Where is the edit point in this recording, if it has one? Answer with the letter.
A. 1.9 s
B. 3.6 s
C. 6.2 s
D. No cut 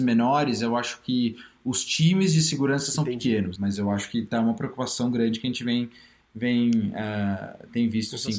B